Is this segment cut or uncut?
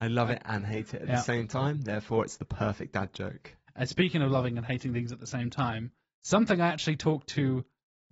uncut